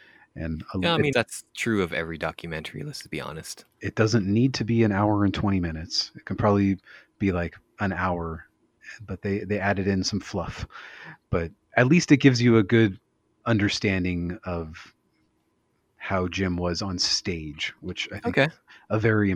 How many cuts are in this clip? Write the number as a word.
one